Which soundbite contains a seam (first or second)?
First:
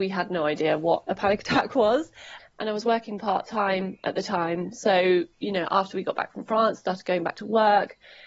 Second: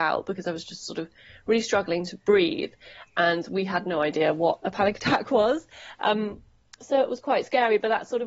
first